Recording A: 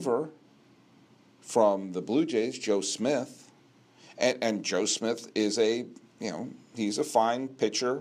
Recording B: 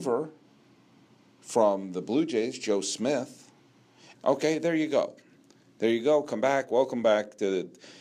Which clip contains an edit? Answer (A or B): B